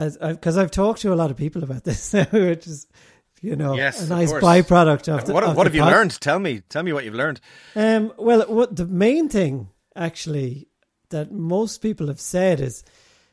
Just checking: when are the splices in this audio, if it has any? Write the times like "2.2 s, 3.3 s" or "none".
none